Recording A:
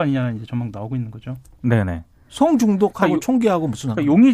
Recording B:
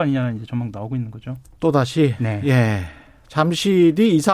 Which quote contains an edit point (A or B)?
A